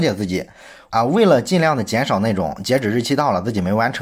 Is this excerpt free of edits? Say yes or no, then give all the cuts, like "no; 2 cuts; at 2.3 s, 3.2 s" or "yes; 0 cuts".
yes; 0 cuts